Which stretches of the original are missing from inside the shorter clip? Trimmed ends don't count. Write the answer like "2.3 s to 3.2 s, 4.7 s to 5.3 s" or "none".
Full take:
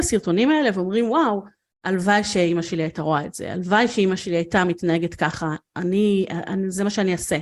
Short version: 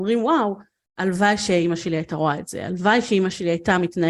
none